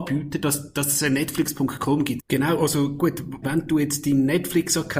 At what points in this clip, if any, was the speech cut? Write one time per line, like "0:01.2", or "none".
0:02.2
0:03.4